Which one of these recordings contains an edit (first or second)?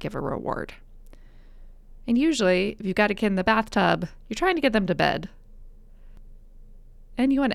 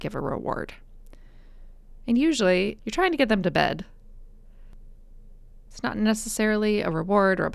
second